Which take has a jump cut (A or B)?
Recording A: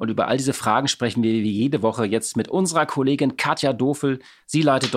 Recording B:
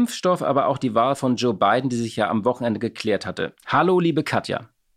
B